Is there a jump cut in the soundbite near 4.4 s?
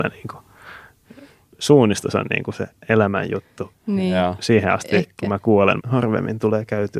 no; 1 cut; at 5.8 s

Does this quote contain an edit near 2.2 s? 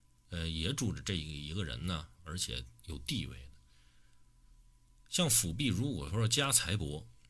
yes; 1 cut; at 2.2 s

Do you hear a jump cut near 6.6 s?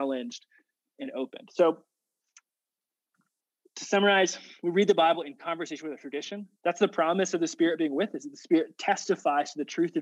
yes; 1 cut; at 6.6 s

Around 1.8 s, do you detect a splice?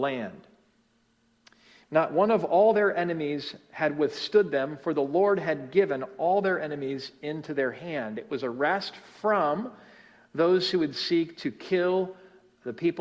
yes; 1 cut; at 1.8 s

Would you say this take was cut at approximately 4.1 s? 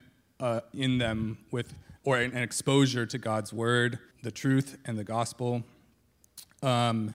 yes; 1 cut; at 4.1 s

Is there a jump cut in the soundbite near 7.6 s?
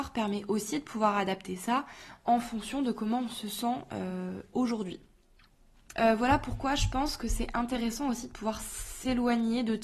no; 1 cut; at 5.9 s

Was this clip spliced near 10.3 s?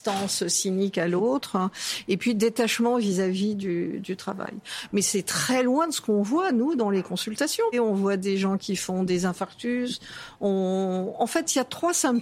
no; 1 cut; at 7.7 s

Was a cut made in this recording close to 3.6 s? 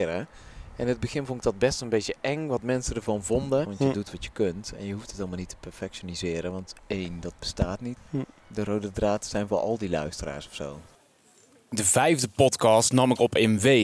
yes; 2 cuts; at 3.6 s, 8.0 s

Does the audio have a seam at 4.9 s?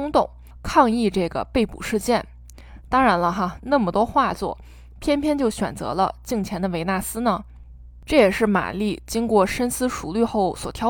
no; 1 cut; at 3.6 s

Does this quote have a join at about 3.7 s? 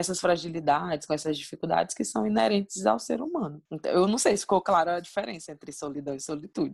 yes; 1 cut; at 3.7 s

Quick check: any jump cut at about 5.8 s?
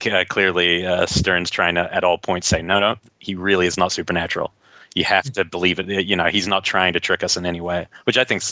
no; 0 cuts

